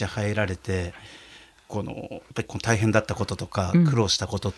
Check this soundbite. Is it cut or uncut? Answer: cut